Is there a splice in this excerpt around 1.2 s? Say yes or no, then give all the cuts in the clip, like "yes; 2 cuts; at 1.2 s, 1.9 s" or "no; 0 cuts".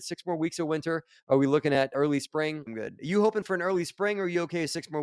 no; 1 cut; at 2.7 s